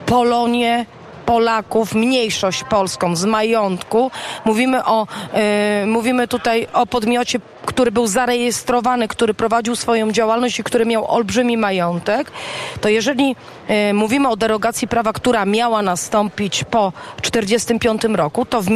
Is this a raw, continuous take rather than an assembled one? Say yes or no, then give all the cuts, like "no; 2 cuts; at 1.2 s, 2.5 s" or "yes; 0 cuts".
yes; 0 cuts